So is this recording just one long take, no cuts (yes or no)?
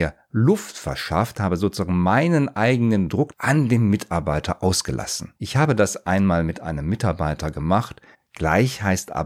no